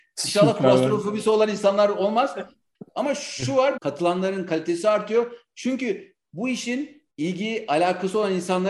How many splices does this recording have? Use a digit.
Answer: 2